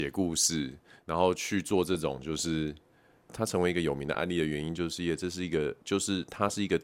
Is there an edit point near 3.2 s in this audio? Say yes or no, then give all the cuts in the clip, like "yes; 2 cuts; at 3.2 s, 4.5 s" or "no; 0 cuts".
yes; 1 cut; at 3.2 s